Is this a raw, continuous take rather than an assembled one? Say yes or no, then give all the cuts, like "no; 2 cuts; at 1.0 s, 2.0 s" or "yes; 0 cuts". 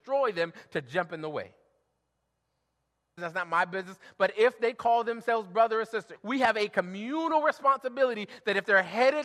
no; 2 cuts; at 3.2 s, 6.2 s